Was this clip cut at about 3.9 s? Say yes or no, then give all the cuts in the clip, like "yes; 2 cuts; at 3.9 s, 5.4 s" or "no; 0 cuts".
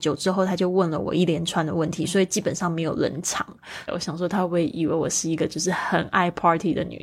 yes; 1 cut; at 3.9 s